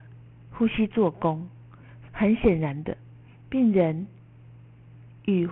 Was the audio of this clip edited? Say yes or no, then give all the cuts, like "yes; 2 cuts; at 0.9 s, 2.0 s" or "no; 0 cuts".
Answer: yes; 1 cut; at 2.1 s